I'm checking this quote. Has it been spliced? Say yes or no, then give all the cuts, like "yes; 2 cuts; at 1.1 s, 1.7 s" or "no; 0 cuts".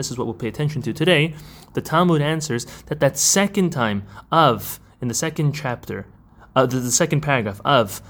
no; 0 cuts